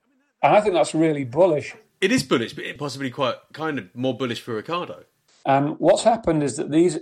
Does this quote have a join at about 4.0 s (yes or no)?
no